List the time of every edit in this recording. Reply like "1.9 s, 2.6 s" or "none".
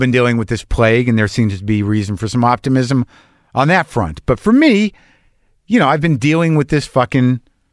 none

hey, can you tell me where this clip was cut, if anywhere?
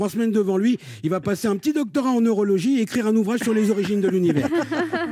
none

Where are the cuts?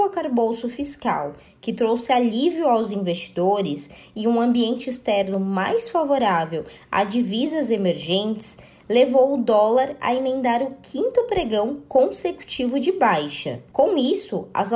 none

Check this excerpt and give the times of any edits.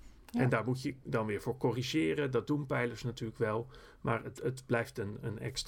none

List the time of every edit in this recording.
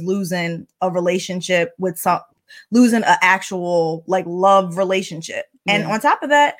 none

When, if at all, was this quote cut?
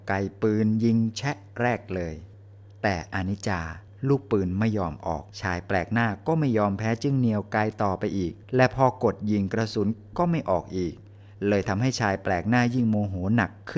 5.3 s, 8.4 s

